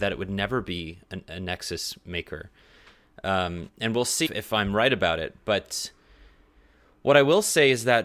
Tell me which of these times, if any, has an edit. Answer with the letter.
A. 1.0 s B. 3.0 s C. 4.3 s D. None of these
C